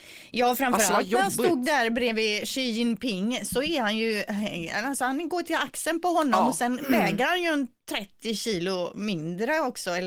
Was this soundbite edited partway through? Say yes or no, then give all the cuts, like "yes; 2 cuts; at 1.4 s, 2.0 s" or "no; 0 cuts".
no; 0 cuts